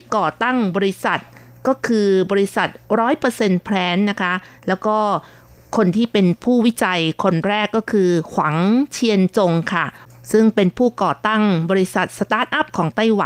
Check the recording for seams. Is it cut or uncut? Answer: uncut